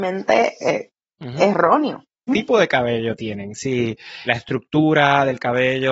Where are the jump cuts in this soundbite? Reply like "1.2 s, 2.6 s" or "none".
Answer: 2.3 s, 4.3 s